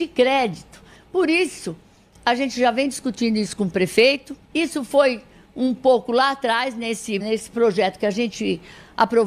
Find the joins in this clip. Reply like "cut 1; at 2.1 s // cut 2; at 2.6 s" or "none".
cut 1; at 1.0 s // cut 2; at 4.4 s // cut 3; at 7.2 s